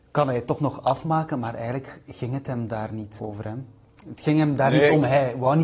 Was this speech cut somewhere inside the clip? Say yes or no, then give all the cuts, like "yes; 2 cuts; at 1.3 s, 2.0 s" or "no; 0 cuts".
yes; 1 cut; at 3.2 s